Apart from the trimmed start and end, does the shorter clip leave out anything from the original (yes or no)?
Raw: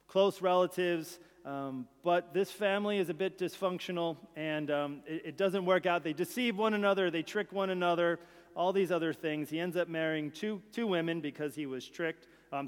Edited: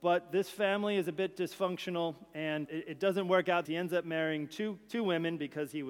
yes